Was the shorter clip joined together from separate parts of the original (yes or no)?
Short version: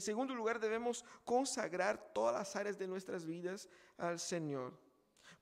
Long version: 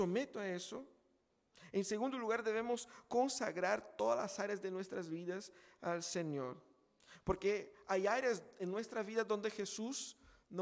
no